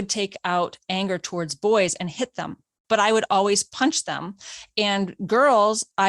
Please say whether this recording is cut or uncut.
cut